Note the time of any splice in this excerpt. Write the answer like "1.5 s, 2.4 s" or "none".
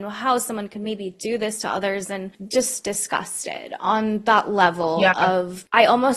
none